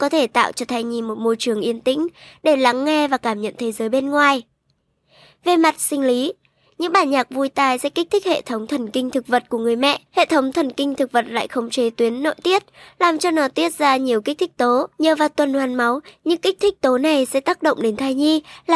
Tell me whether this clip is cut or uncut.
cut